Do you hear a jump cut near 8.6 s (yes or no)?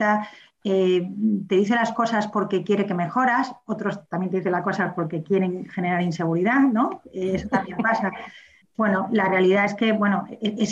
yes